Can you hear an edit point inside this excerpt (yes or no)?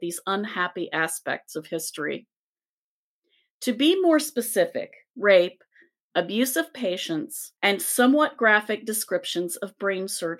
yes